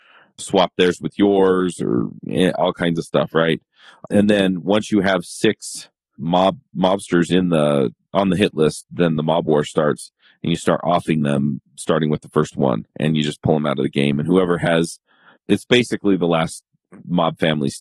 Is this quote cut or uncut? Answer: cut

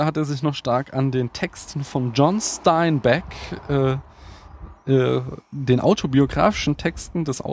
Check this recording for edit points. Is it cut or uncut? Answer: uncut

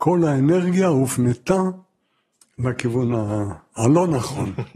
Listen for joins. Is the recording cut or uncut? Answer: uncut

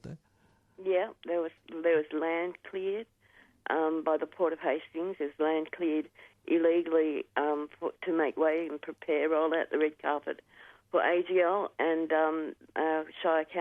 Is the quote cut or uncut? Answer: uncut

